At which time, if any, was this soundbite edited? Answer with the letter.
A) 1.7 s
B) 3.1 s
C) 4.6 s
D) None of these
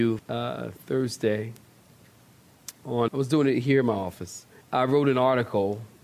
B